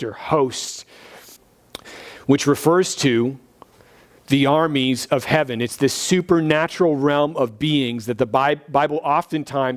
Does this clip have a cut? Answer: yes; 1 cut; at 1.4 s

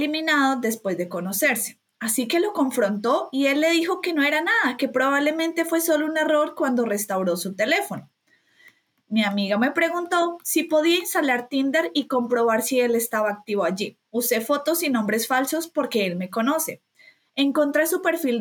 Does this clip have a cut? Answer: yes; 1 cut; at 14.0 s

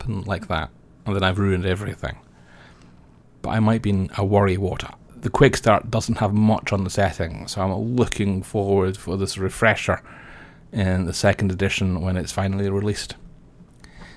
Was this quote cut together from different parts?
yes; 1 cut; at 5.0 s

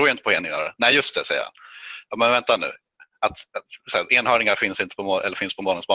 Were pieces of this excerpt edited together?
no; 0 cuts

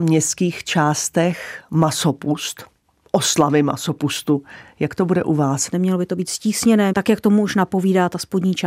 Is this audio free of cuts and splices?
no; 2 cuts; at 5.7 s, 6.9 s

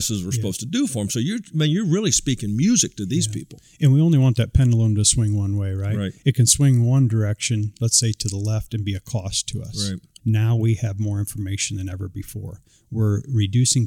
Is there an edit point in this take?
yes; 1 cut; at 10.2 s

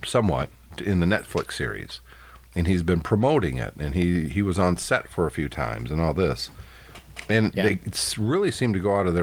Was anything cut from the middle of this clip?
no; 0 cuts

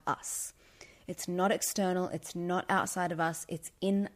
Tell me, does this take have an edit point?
no; 0 cuts

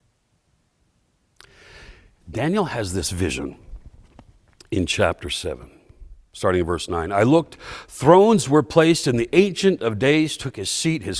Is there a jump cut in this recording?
yes; 1 cut; at 2.2 s

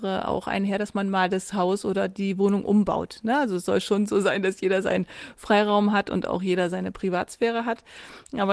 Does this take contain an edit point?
no; 0 cuts

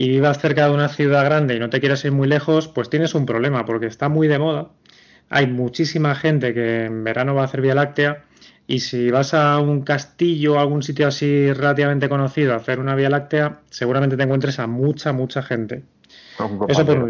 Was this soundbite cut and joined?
no; 0 cuts

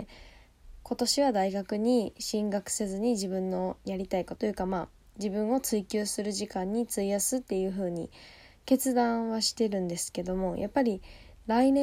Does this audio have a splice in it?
yes; 1 cut; at 4.4 s

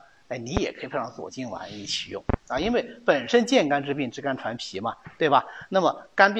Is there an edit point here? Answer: no; 0 cuts

